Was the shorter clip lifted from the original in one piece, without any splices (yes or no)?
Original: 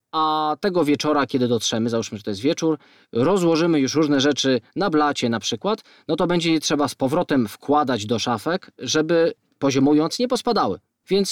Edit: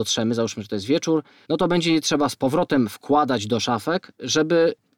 no